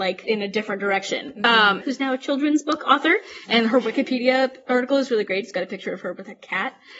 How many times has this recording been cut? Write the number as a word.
one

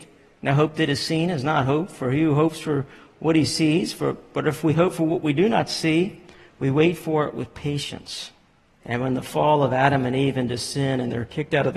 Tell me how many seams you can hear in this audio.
one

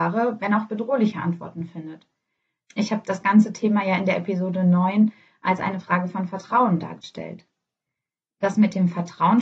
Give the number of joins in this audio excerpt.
one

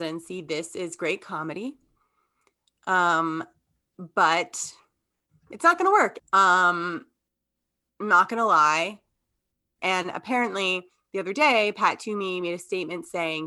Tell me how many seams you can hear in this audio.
two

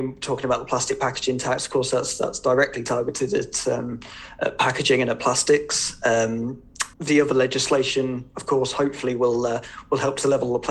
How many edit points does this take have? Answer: one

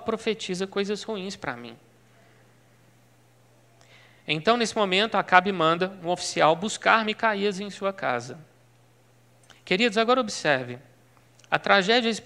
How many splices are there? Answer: zero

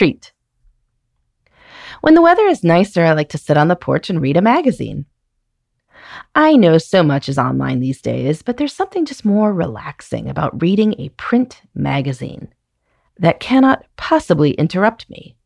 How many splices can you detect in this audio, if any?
zero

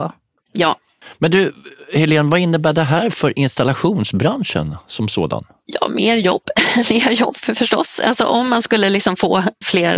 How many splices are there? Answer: zero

